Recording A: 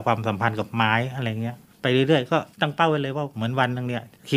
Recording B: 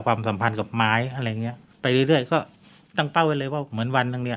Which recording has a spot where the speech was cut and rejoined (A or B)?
A